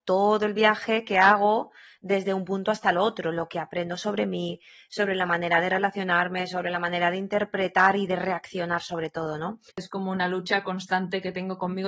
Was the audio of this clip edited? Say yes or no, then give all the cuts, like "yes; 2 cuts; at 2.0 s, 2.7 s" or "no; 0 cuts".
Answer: yes; 1 cut; at 9.7 s